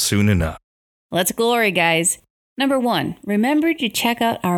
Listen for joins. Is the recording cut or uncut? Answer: cut